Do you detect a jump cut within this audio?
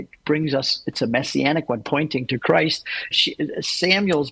yes; 1 cut; at 3.1 s

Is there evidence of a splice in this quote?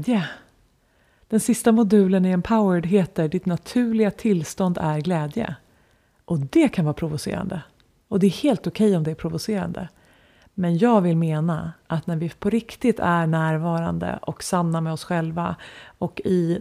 no; 0 cuts

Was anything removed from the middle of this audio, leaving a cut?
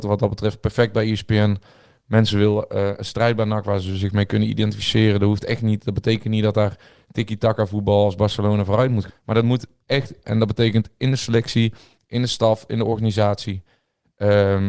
yes; 2 cuts; at 9.1 s, 10.2 s

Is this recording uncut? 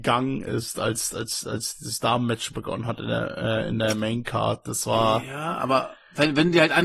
yes; 0 cuts

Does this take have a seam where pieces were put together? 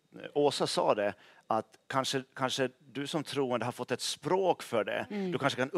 no; 0 cuts

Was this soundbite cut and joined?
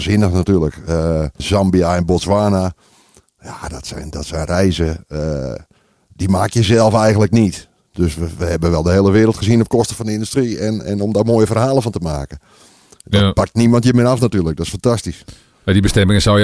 yes; 1 cut; at 1.4 s

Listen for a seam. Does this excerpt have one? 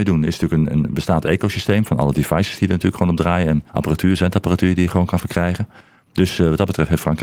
yes; 1 cut; at 3.7 s

